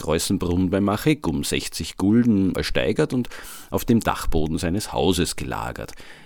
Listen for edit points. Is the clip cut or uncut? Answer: cut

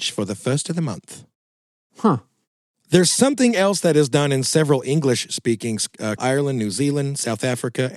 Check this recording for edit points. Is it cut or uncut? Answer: cut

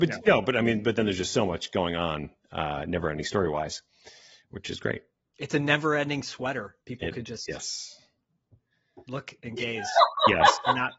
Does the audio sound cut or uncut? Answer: uncut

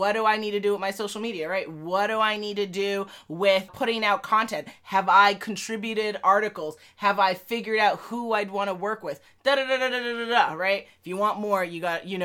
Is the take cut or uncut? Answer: cut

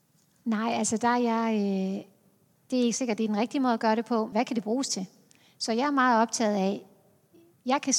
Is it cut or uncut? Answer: cut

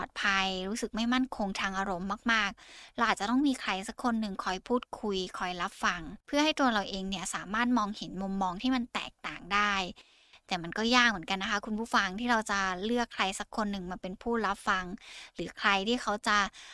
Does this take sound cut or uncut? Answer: cut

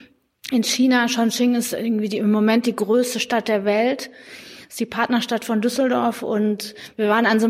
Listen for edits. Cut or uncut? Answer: uncut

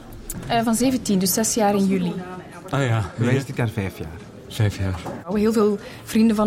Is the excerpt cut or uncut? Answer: cut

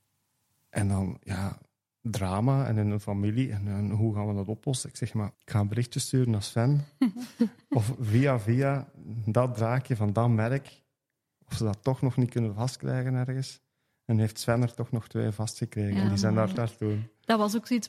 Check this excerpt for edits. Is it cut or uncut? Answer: cut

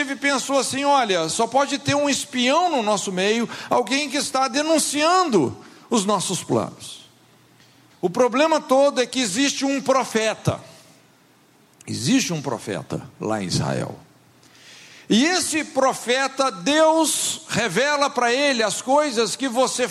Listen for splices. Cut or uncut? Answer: cut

